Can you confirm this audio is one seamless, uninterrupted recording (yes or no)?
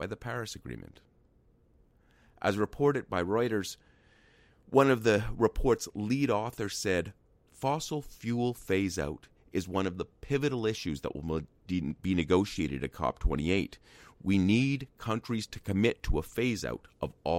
yes